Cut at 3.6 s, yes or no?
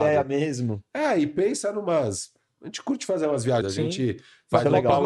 yes